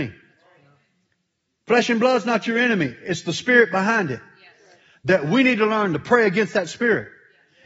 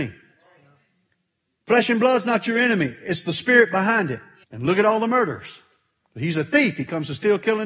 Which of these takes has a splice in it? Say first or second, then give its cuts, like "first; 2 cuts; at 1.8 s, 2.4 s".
second; 1 cut; at 4.4 s